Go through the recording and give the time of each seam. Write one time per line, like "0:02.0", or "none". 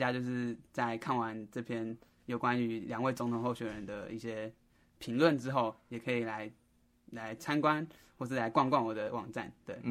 none